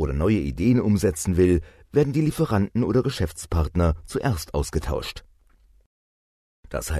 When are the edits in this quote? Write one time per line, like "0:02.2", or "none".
none